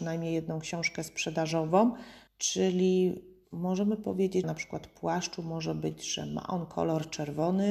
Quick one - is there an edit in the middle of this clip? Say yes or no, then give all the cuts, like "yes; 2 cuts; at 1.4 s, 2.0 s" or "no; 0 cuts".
yes; 2 cuts; at 2.3 s, 4.4 s